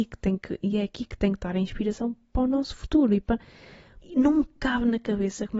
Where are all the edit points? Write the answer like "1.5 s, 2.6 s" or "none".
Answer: 4.0 s